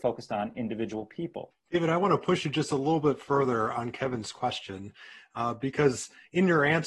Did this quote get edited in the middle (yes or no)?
yes